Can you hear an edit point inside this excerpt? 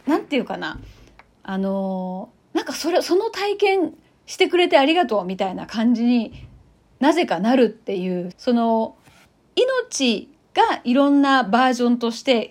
yes; 1 cut; at 8.3 s

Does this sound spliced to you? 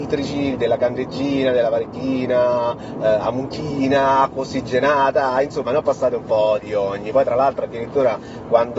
no; 0 cuts

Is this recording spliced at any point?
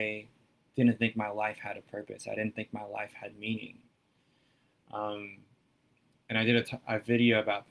no; 0 cuts

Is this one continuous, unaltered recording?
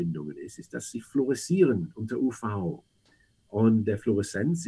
yes; 0 cuts

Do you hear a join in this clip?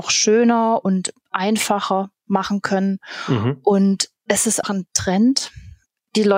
yes; 1 cut; at 4.6 s

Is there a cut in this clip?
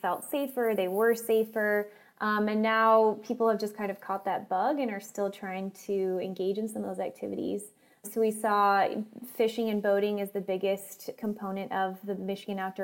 no; 0 cuts

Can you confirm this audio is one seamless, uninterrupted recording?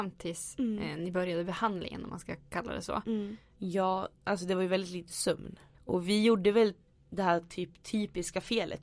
no; 2 cuts; at 3.6 s, 5.7 s

